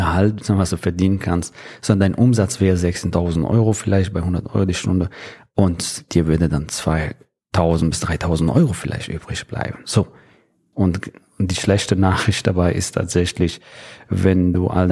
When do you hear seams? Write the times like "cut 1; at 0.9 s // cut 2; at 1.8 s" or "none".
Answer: cut 1; at 10.7 s